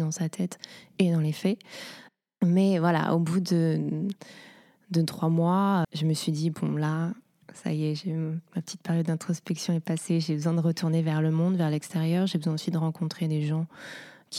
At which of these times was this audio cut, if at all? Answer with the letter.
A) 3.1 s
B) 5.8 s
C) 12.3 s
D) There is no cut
B